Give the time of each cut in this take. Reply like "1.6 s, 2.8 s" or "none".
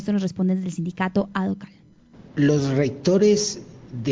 2.3 s